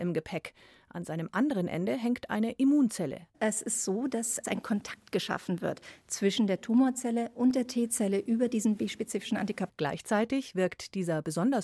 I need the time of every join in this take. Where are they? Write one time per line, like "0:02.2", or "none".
0:03.3
0:09.7

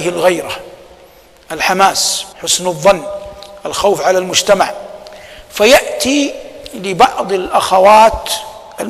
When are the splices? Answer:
0:02.3

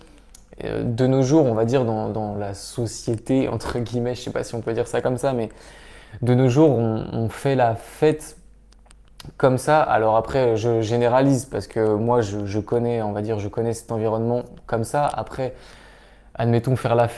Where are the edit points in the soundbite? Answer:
none

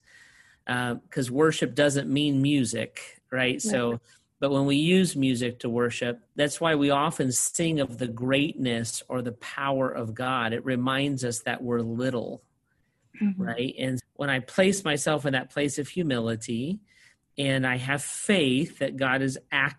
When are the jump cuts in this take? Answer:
0:06.3
0:14.0

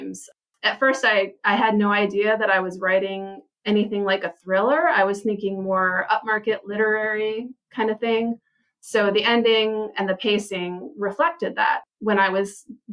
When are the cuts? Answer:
none

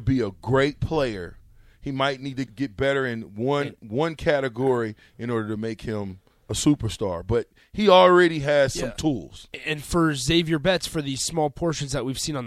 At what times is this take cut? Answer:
0:02.5

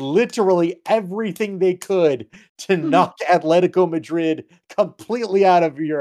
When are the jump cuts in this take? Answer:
none

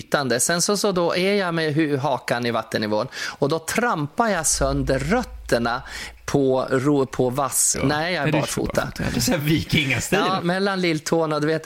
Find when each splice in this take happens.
0:07.7
0:09.1
0:10.4

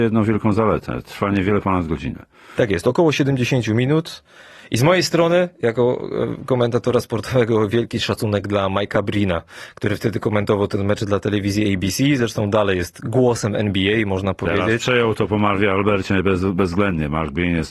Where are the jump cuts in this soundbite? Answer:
none

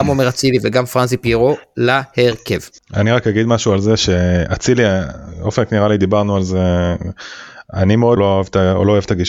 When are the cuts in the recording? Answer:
0:08.2

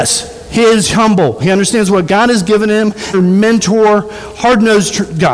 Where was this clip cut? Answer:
0:01.4
0:03.1

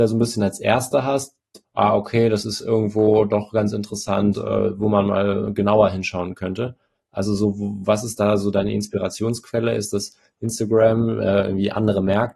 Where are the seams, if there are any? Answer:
0:01.6
0:04.3

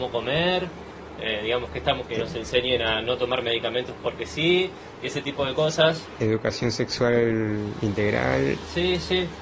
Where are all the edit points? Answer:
0:02.0

